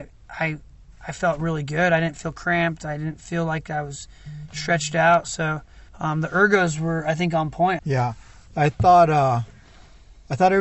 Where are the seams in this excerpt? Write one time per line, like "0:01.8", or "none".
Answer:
0:05.9
0:07.8